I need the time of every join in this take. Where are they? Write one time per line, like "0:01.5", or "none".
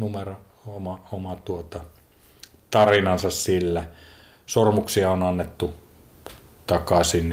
none